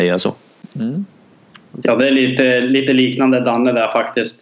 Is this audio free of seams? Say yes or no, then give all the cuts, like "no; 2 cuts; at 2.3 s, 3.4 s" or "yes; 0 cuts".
no; 1 cut; at 1.8 s